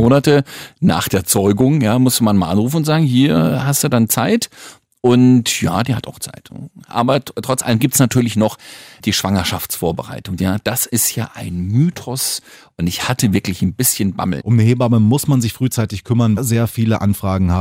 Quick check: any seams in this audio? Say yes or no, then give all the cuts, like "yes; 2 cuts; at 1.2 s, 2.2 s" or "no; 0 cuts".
yes; 3 cuts; at 10.4 s, 14.4 s, 16.4 s